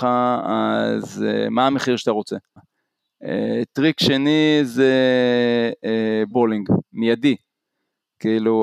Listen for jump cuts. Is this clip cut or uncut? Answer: cut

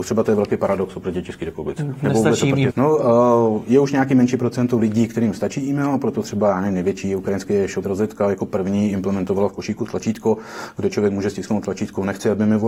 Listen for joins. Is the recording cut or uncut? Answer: cut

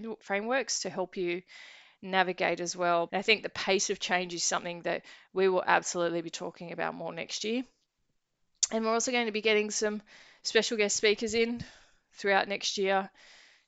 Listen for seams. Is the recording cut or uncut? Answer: cut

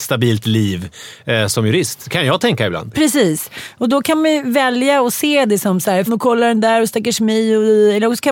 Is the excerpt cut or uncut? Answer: cut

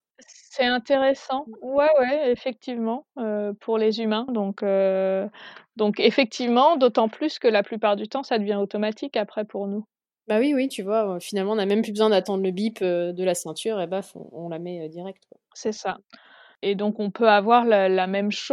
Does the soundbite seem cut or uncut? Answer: cut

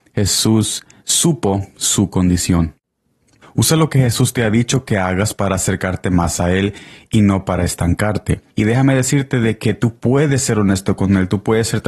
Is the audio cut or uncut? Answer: cut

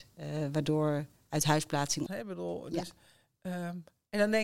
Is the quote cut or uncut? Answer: cut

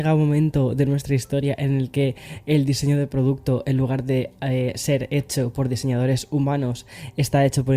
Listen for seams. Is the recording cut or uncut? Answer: uncut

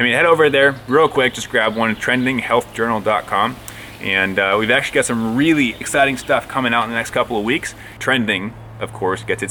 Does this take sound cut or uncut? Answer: cut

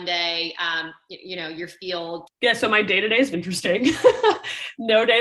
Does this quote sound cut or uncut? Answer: cut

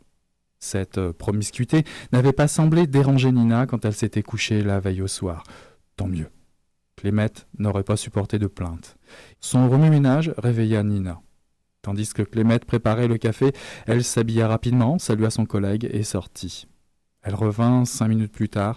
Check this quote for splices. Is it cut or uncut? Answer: cut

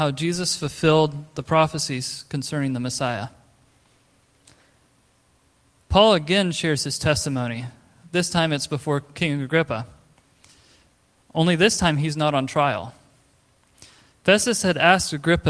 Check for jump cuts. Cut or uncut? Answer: uncut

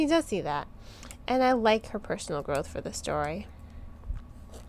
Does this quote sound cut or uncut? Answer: uncut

